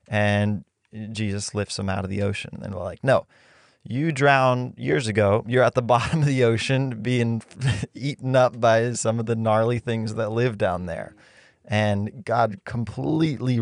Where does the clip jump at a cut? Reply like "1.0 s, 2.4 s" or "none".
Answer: none